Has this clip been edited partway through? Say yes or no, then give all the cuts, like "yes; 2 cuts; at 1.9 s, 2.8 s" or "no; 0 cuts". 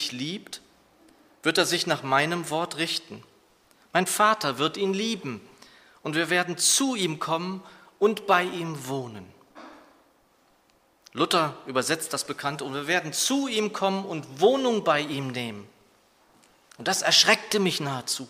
no; 0 cuts